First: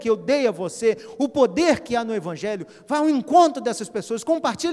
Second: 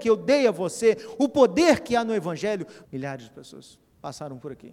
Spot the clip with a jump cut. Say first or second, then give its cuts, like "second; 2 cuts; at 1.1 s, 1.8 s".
second; 1 cut; at 2.8 s